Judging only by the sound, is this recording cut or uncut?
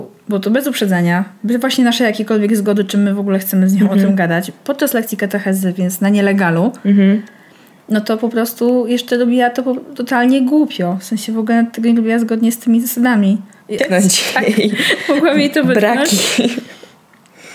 cut